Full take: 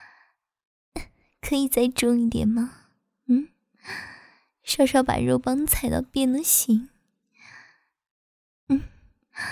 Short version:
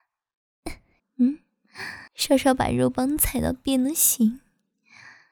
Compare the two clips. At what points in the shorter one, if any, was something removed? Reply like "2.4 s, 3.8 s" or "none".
1.0 s, 2.1 s